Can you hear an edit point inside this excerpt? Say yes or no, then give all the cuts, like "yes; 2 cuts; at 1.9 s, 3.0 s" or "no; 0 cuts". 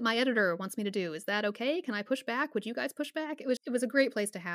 yes; 1 cut; at 3.6 s